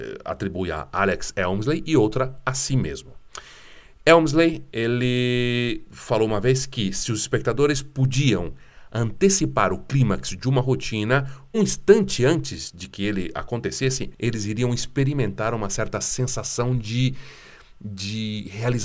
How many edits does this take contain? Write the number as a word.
two